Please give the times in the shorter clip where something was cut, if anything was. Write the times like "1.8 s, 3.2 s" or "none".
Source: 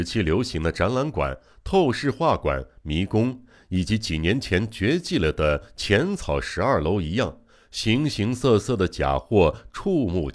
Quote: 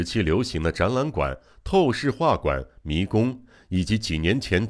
none